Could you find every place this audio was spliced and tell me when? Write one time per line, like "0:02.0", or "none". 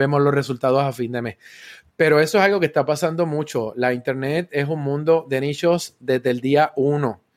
none